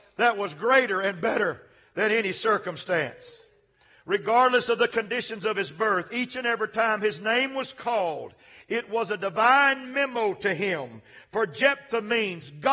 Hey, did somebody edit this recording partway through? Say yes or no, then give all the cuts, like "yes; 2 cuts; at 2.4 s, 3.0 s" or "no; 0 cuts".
no; 0 cuts